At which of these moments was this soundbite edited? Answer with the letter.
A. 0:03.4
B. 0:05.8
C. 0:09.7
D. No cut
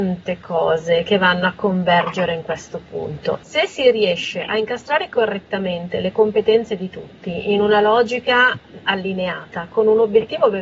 A